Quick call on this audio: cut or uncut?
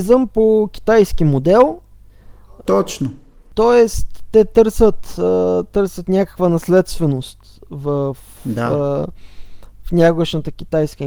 uncut